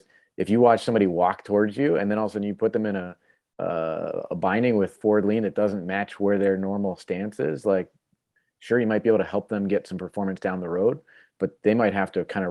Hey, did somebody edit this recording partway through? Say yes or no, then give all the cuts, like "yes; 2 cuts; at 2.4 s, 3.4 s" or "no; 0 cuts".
no; 0 cuts